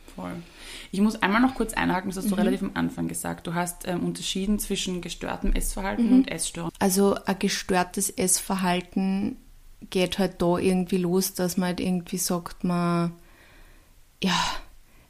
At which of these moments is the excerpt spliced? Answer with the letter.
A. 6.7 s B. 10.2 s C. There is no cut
A